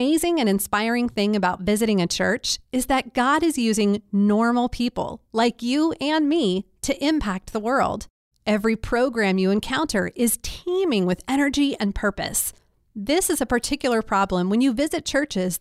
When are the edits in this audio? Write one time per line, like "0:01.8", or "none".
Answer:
0:08.3